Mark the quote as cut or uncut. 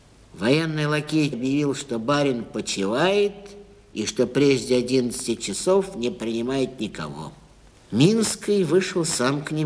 cut